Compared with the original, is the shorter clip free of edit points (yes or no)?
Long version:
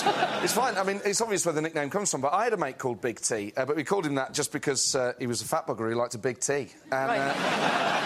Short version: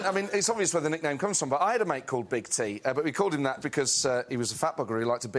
no